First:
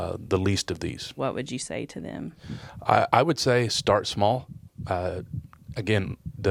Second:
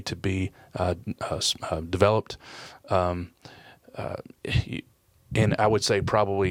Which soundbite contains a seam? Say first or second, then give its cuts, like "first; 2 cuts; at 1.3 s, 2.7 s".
first; 1 cut; at 1.2 s